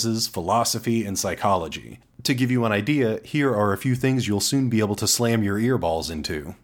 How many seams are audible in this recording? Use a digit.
1